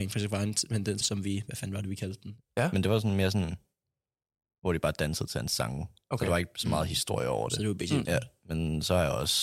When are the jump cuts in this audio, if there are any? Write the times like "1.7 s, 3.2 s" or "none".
1.0 s, 2.4 s, 8.1 s